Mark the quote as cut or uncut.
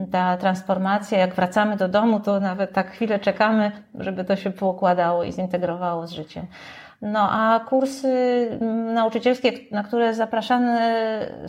uncut